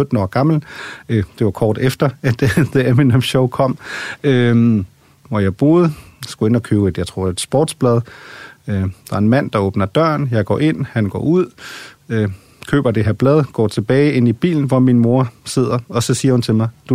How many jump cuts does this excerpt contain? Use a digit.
1